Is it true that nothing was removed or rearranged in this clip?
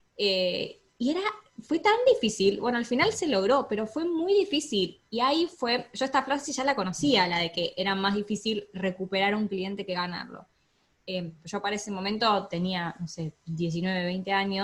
yes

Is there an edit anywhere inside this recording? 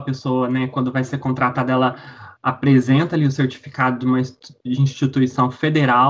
no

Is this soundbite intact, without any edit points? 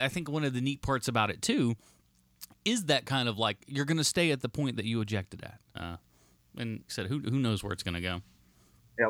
no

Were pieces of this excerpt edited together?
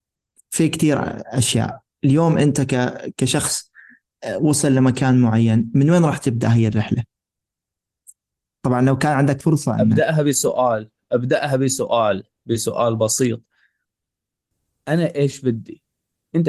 no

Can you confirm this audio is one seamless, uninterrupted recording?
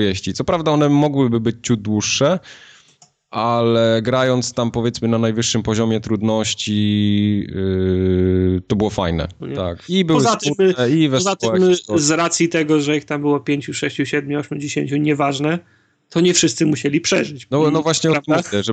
no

